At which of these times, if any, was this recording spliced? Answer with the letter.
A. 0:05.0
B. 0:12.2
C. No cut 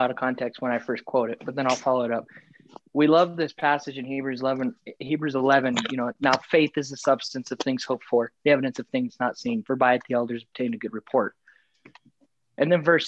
C